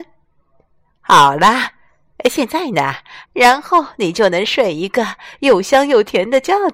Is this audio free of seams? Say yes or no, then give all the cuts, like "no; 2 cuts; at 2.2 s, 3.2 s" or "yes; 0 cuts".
no; 1 cut; at 3.2 s